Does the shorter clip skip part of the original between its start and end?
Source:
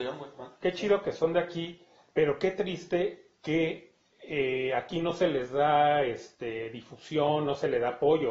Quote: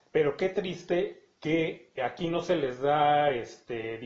yes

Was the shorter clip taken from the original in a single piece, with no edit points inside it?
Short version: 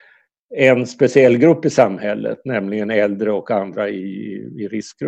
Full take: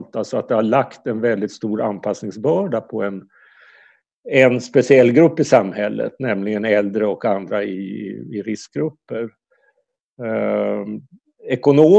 yes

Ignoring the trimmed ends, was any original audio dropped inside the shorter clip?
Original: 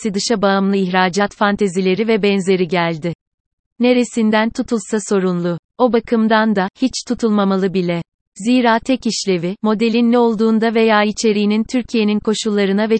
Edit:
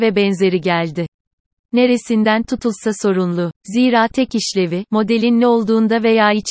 yes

